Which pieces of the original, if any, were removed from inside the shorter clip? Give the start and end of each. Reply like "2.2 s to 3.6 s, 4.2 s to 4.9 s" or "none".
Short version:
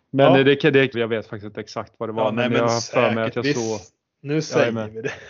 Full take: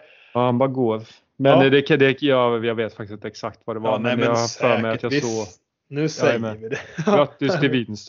2.2 s to 2.6 s